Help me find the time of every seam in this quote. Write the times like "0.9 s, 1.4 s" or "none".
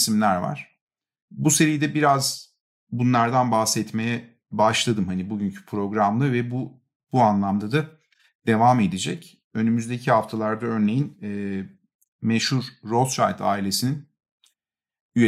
none